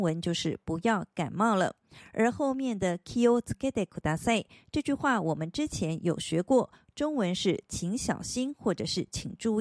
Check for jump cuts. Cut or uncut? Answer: uncut